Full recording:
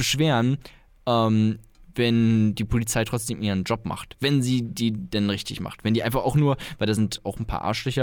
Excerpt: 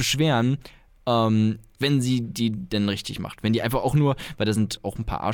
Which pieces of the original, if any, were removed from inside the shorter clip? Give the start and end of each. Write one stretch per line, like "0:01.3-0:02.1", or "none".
0:01.8-0:04.2